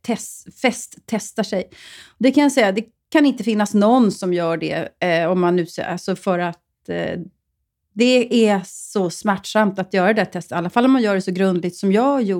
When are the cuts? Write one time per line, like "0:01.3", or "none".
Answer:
none